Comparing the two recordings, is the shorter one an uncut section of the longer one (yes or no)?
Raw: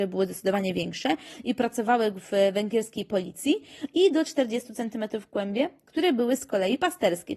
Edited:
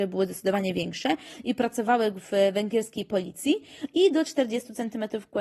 yes